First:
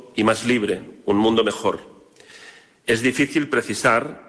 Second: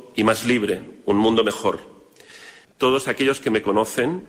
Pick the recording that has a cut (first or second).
second